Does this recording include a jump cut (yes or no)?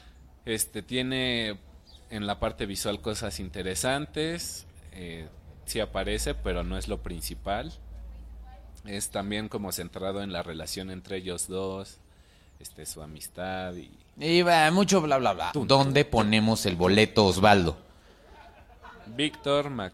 yes